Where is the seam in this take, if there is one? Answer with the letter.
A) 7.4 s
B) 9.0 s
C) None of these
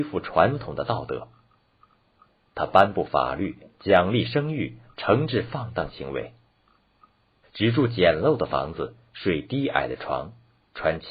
A